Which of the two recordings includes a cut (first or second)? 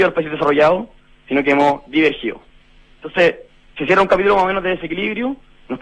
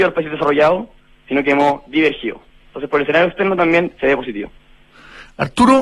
second